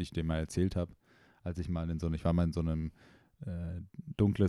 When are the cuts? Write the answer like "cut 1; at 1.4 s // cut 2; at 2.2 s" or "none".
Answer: none

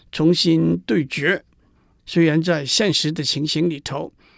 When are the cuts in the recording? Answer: none

